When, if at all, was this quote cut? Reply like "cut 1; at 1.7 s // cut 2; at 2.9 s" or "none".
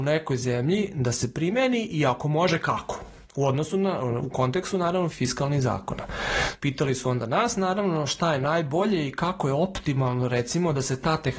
cut 1; at 5.1 s // cut 2; at 6.6 s